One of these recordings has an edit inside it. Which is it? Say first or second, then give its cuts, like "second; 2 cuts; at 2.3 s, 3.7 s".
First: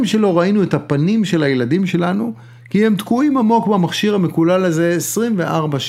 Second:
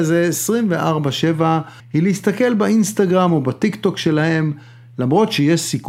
second; 1 cut; at 1.8 s